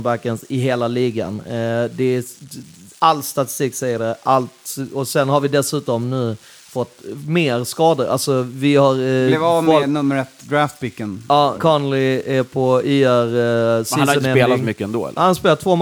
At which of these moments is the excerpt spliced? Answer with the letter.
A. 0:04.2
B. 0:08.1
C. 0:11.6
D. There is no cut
C